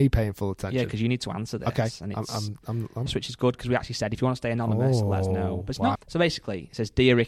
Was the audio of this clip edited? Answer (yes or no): yes